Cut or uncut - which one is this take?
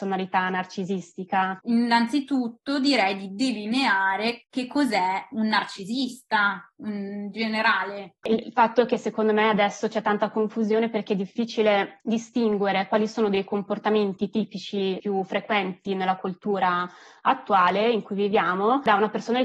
cut